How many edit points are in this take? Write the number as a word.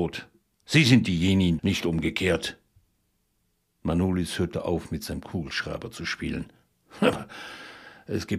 one